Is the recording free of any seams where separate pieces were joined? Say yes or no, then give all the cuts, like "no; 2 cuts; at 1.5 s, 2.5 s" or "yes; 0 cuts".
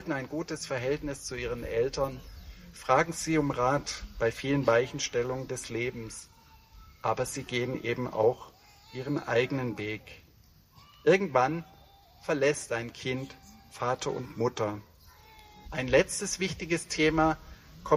no; 1 cut; at 15.6 s